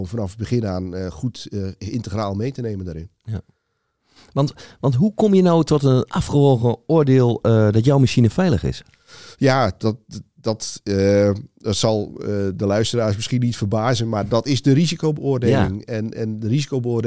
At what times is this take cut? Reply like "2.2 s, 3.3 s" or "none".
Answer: none